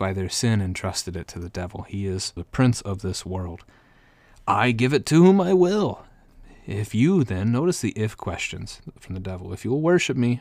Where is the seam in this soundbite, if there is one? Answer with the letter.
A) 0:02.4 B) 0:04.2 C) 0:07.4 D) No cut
A